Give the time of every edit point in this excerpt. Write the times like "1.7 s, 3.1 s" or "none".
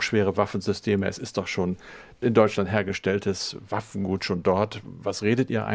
none